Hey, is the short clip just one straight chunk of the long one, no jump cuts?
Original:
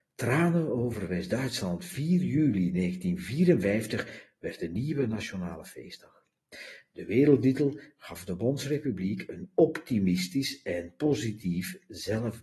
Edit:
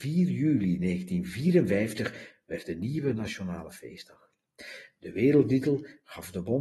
yes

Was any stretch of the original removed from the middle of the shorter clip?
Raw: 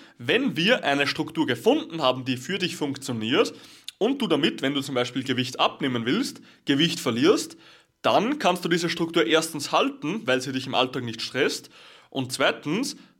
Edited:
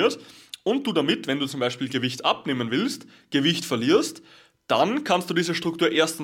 no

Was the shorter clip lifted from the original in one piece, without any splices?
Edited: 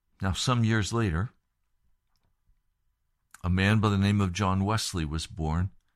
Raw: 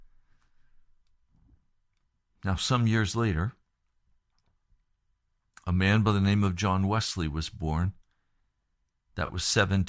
yes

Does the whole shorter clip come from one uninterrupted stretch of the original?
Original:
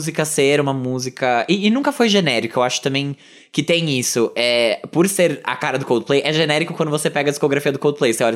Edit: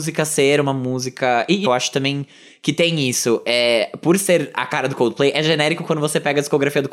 no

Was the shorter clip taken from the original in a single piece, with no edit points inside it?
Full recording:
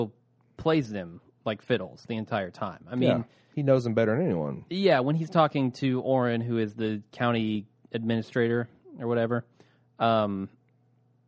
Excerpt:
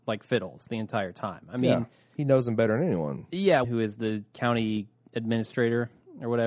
no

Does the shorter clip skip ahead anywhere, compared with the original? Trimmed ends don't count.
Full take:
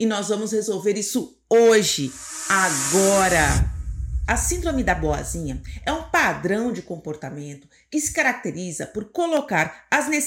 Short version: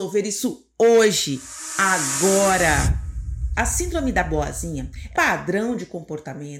yes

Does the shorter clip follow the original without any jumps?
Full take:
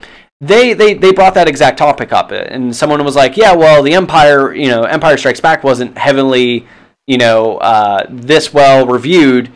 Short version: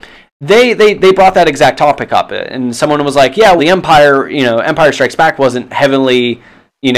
no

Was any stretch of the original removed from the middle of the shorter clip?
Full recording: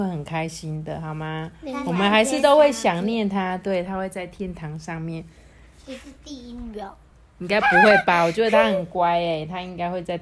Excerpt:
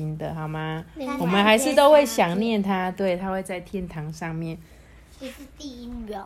no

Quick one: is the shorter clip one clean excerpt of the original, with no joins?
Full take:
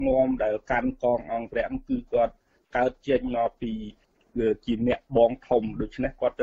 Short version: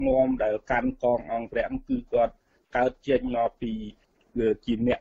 yes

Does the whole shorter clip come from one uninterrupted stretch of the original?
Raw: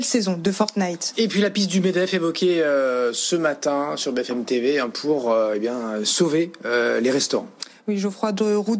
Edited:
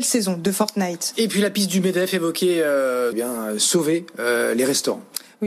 no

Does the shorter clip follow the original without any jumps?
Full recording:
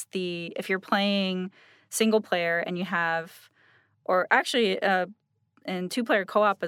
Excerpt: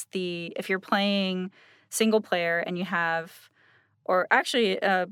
yes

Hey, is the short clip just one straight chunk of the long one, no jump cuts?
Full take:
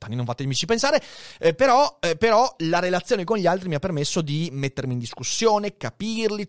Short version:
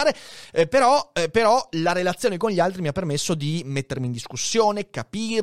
yes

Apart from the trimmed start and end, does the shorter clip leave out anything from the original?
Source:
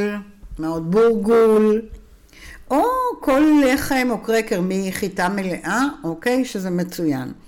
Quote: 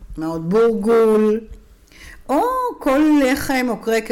no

